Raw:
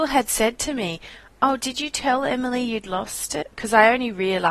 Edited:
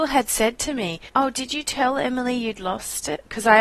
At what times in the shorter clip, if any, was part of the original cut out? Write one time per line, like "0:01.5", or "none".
0:01.1